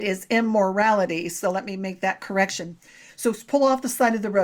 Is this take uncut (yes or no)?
no